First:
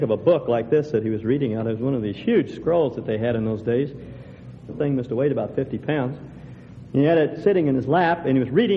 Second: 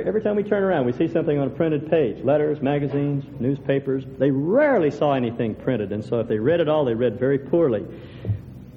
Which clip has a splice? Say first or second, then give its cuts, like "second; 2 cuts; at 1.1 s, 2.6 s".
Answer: first; 1 cut; at 4.7 s